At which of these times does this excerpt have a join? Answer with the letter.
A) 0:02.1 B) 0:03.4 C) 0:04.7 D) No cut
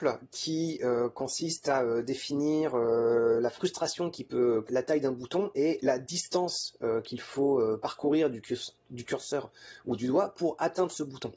C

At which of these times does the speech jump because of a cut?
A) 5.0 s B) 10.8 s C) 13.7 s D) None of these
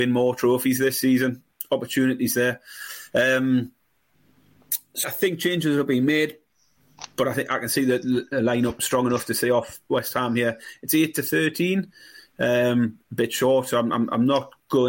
A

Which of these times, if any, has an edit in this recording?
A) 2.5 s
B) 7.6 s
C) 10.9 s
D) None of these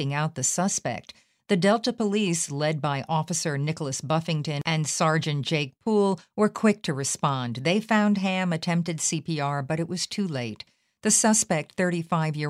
D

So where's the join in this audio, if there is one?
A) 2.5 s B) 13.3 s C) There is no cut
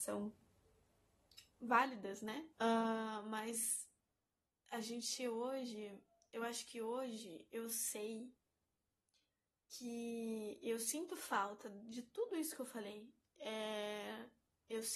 A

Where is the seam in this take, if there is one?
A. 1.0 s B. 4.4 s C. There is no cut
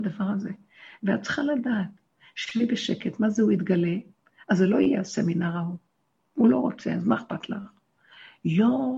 C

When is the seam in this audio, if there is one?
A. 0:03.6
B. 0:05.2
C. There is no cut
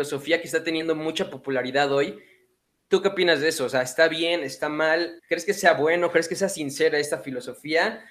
B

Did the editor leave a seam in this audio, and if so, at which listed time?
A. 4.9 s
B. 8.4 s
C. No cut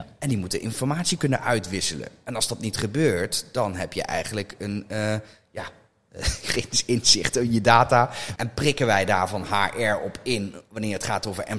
B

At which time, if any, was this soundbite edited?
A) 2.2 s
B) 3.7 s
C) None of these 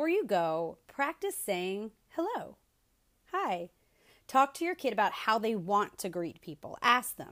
C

